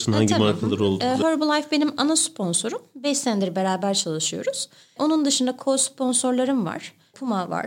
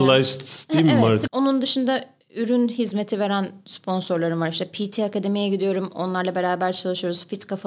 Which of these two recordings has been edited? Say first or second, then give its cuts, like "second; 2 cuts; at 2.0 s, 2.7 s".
second; 1 cut; at 1.3 s